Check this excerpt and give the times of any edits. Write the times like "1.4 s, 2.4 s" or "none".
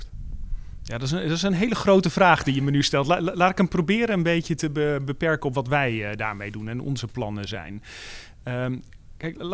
none